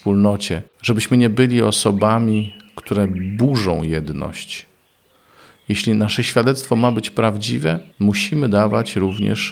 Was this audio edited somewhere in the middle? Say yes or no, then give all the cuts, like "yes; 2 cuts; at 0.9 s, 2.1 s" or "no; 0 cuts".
yes; 1 cut; at 7.9 s